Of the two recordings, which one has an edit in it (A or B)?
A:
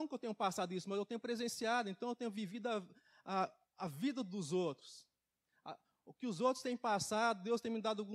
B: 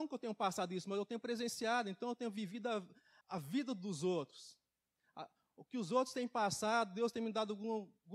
B